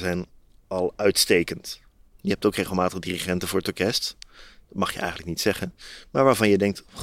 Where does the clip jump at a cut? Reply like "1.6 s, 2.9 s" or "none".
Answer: none